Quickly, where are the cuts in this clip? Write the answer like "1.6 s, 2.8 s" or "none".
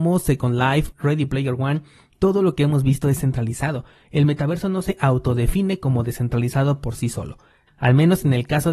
0.9 s, 7.7 s